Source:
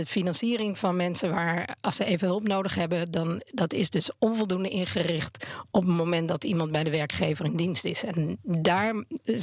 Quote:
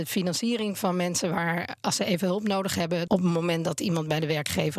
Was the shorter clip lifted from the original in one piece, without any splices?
no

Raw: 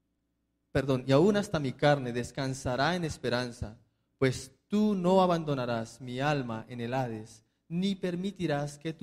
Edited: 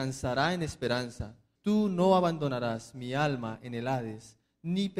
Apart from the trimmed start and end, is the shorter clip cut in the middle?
yes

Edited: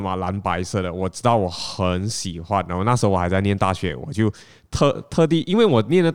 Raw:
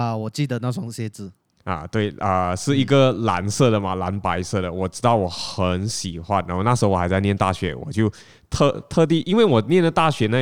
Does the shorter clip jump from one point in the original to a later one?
no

